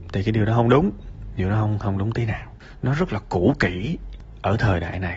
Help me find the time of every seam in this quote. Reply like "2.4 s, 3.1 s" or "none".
none